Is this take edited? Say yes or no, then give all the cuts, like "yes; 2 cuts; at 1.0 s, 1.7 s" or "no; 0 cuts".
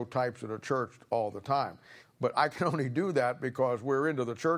yes; 1 cut; at 2.0 s